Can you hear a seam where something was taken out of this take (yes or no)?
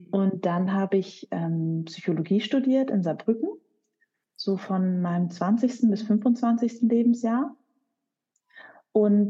no